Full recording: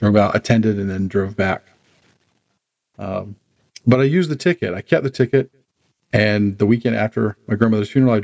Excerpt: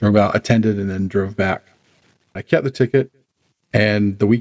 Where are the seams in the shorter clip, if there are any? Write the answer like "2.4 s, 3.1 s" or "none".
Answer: 2.4 s